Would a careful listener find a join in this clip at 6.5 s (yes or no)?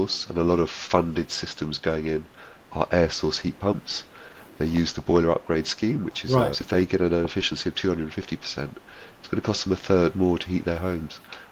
yes